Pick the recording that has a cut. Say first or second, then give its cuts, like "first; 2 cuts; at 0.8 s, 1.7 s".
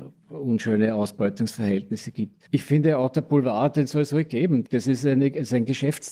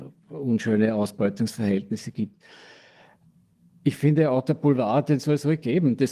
first; 2 cuts; at 2.5 s, 4.7 s